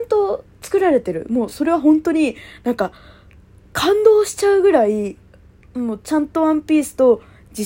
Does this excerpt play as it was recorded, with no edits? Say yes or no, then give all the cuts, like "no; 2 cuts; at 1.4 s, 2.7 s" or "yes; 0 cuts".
yes; 0 cuts